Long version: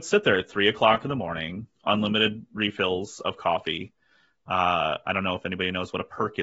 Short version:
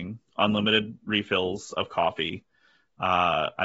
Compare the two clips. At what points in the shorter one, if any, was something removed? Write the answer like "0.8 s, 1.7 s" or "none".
none